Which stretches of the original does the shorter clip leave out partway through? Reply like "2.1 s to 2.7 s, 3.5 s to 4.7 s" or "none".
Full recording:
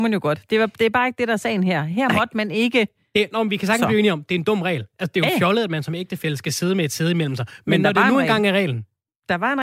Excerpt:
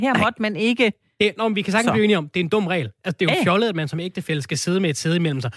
none